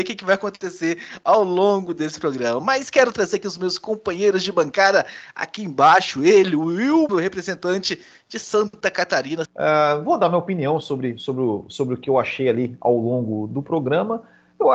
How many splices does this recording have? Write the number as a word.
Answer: two